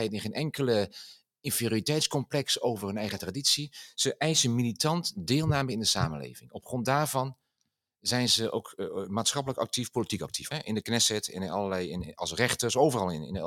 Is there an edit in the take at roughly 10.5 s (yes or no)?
yes